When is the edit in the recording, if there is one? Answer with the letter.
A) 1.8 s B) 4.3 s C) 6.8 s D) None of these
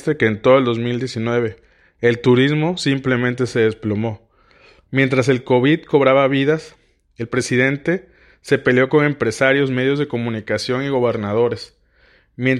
D